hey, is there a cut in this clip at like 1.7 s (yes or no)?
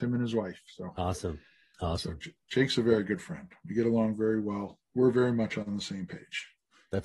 yes